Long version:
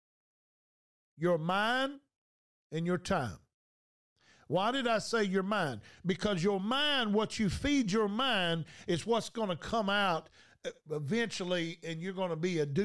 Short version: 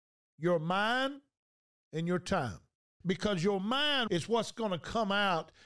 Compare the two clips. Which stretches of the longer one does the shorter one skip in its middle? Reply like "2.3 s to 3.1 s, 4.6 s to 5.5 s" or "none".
3.8 s to 6.0 s, 7.1 s to 8.8 s

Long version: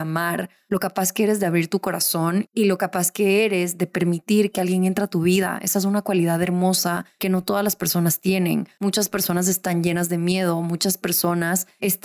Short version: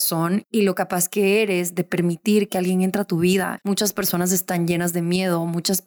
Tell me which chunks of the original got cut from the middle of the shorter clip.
5.6 s to 8.7 s

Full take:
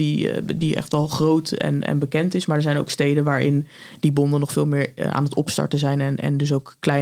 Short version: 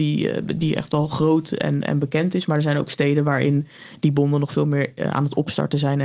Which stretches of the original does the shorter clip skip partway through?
none

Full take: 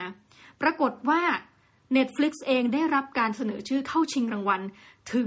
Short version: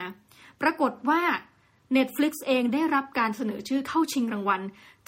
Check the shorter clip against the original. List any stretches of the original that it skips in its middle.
none

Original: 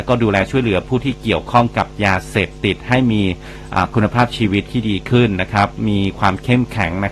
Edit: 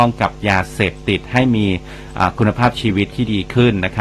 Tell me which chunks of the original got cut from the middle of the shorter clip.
none

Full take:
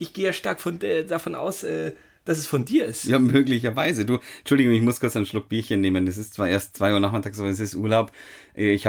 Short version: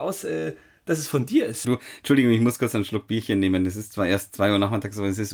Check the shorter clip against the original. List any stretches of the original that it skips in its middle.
3.0 s to 4.1 s

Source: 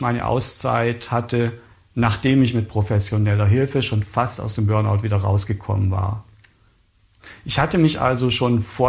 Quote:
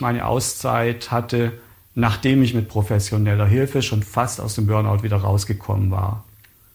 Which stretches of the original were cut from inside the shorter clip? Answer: none

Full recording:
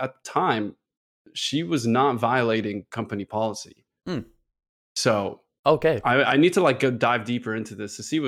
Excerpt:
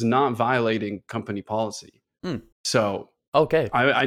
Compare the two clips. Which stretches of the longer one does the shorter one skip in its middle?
4.4 s to 4.8 s

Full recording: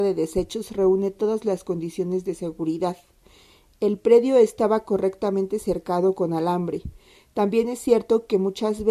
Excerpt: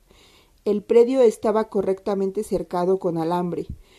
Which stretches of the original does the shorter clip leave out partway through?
none

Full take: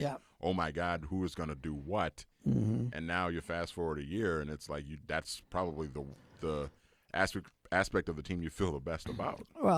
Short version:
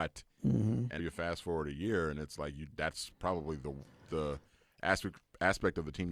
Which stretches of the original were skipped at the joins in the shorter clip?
3.0 s to 3.3 s

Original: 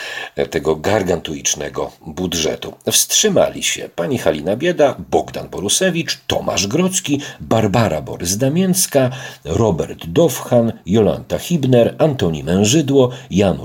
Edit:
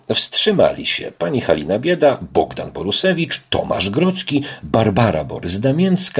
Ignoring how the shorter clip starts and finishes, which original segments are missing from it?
none

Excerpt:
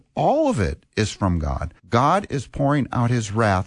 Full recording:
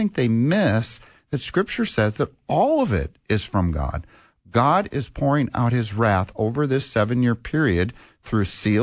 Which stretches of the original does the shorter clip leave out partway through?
4.1 s to 4.4 s

